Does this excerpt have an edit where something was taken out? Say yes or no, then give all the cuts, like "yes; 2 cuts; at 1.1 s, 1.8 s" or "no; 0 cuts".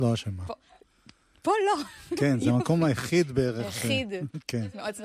no; 0 cuts